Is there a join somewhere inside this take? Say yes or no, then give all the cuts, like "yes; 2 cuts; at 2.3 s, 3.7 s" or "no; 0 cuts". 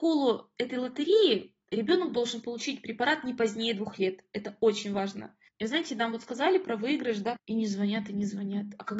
yes; 2 cuts; at 5.5 s, 7.4 s